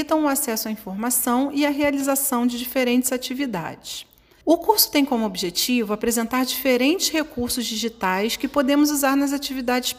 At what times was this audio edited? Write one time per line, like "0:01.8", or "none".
0:04.4